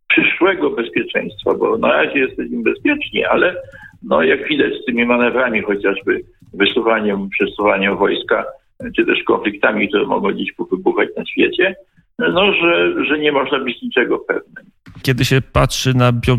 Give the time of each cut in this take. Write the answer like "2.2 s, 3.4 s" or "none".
15.0 s